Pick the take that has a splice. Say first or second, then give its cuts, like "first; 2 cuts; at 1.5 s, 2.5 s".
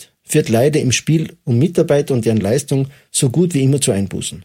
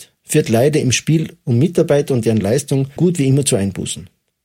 second; 1 cut; at 3.0 s